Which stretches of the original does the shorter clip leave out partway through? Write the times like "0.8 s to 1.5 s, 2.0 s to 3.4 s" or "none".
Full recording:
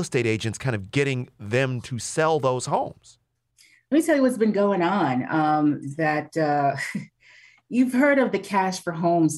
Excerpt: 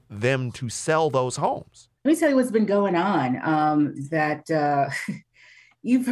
3.3 s to 3.8 s